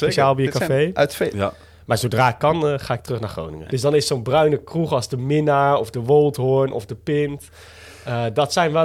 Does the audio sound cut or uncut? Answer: cut